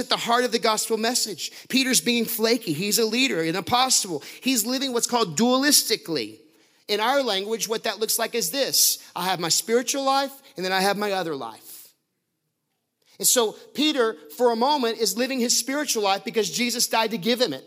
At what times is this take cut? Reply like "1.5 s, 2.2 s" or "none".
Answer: none